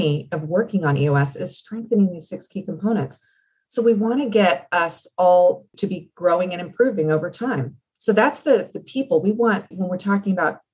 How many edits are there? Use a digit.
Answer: 2